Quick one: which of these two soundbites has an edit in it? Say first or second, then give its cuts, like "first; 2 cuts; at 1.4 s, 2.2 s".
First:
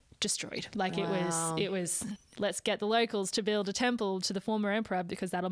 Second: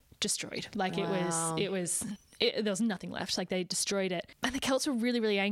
first; 1 cut; at 2.3 s